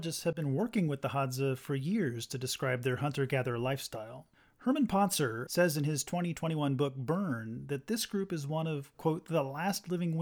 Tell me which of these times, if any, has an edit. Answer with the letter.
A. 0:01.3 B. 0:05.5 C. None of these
B